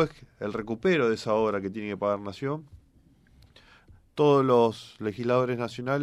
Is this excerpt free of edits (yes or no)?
yes